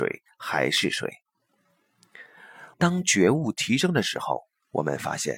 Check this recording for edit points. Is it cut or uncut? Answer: cut